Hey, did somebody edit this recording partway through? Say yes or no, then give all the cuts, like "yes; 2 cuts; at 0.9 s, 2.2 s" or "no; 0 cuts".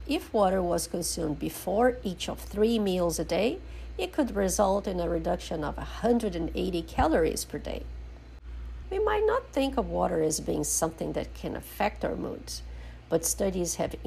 yes; 1 cut; at 8.8 s